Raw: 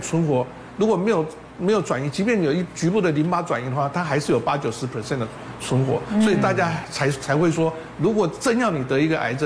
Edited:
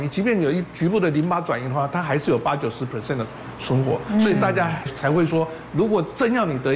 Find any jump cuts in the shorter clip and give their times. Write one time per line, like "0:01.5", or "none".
0:04.9

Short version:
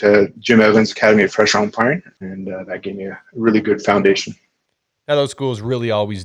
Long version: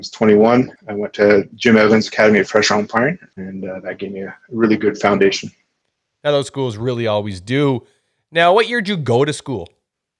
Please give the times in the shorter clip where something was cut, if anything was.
none

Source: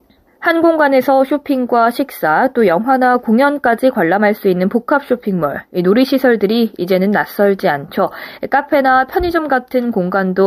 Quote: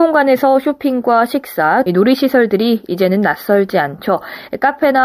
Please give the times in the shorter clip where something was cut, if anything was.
0:01.9

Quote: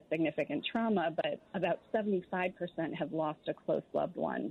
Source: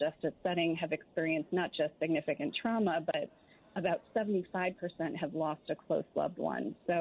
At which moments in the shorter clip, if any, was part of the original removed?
0:01.5

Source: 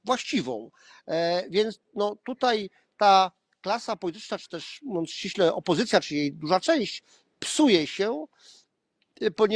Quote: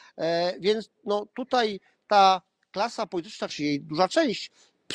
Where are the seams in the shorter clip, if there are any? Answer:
0:03.5

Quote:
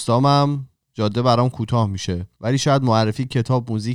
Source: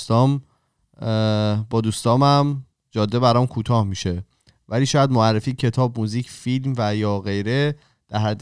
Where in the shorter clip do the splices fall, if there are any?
0:02.3

